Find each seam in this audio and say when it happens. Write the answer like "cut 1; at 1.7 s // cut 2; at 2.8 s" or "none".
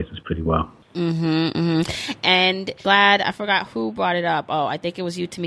none

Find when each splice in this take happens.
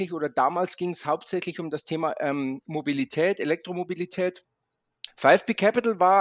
cut 1; at 5.1 s

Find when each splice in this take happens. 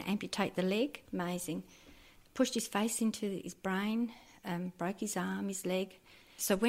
cut 1; at 1.1 s

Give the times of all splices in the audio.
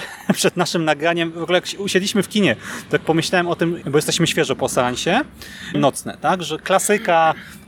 cut 1; at 3.8 s // cut 2; at 5.7 s

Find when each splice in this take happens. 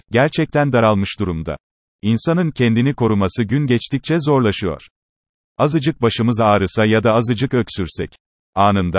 cut 1; at 1.9 s // cut 2; at 5.4 s

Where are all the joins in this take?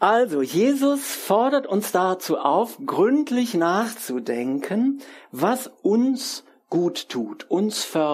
none

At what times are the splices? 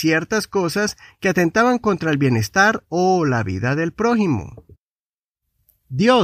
none

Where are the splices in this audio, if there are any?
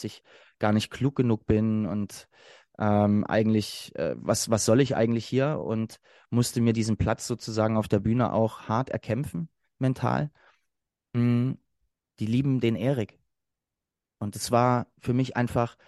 cut 1; at 12.1 s

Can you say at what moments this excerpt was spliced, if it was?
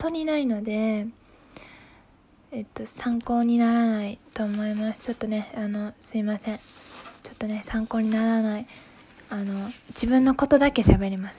cut 1; at 9.8 s

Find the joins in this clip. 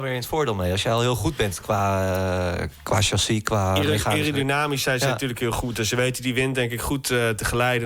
none

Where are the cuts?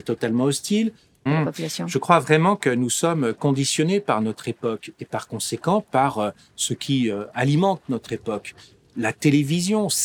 cut 1; at 1.3 s

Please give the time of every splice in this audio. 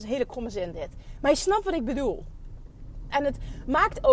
cut 1; at 3.1 s

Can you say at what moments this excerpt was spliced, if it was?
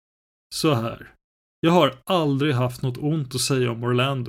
none

